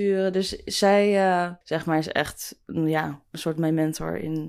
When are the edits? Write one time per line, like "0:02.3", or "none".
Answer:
0:01.6